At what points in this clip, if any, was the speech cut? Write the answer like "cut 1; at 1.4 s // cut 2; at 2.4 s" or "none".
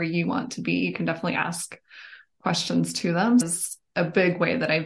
cut 1; at 3.4 s